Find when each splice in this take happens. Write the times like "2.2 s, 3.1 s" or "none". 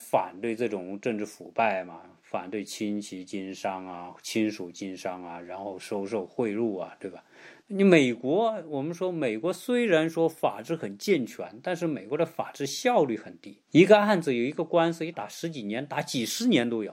7.6 s, 13.7 s, 15.1 s